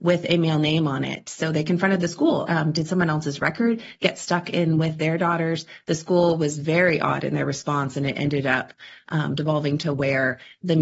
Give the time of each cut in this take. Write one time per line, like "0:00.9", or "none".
0:02.5